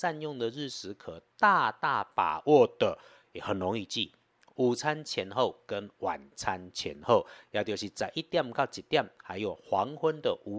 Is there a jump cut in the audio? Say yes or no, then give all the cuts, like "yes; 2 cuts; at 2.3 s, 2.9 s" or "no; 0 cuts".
no; 0 cuts